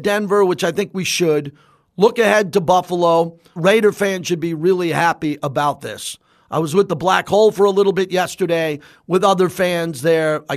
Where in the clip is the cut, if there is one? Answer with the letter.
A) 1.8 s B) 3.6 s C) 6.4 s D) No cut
B